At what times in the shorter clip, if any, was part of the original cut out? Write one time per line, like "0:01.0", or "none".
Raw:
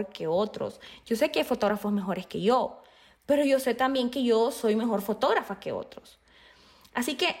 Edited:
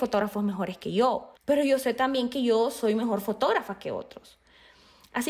0:01.4

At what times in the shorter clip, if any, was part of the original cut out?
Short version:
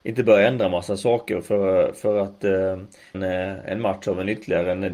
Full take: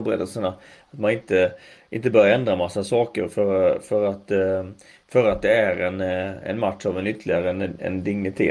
0:03.1

